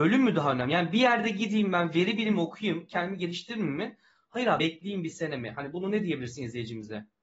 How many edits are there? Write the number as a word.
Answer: one